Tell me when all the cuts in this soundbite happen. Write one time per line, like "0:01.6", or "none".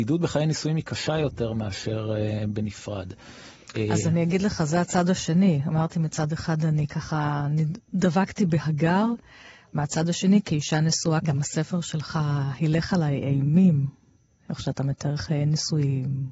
none